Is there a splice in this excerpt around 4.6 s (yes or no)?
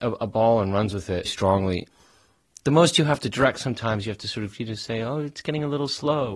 no